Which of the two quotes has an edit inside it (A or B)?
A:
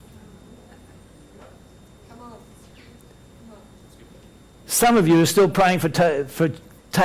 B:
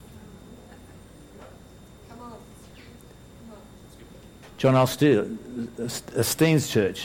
B